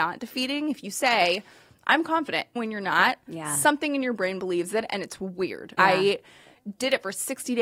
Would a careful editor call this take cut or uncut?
cut